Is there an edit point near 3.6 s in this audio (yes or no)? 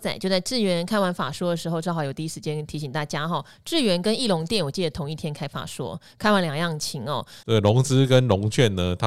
no